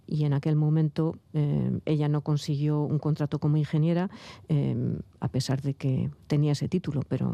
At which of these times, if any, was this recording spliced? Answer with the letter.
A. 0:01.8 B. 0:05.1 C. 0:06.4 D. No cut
D